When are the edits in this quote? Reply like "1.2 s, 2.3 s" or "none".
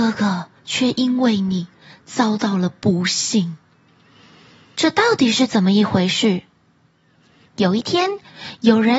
4.7 s, 7.5 s